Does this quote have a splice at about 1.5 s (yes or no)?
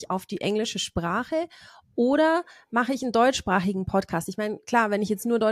no